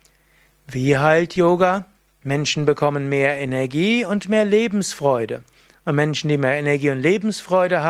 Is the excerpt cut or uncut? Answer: uncut